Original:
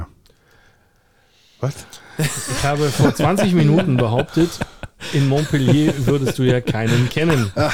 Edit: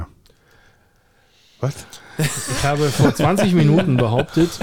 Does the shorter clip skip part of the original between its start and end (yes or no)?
no